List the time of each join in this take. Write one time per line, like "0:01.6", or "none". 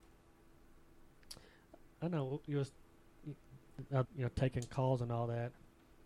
0:04.0